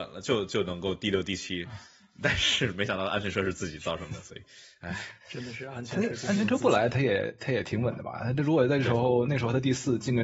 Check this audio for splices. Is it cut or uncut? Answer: uncut